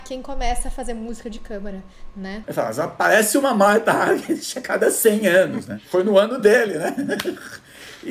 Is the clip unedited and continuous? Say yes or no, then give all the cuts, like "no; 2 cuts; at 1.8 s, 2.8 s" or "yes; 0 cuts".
no; 1 cut; at 2.4 s